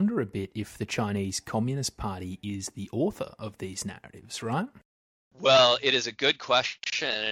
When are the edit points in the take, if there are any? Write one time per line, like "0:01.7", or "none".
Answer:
none